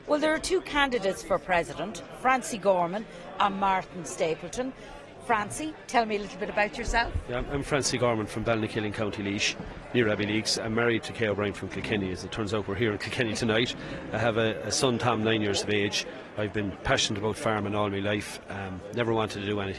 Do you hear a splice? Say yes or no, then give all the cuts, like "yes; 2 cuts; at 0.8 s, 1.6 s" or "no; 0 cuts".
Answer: yes; 1 cut; at 16.4 s